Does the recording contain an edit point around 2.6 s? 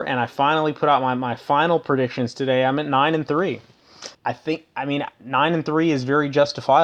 no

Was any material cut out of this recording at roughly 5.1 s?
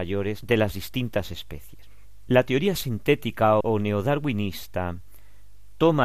no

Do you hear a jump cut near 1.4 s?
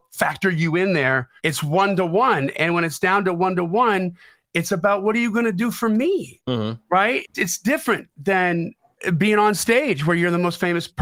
yes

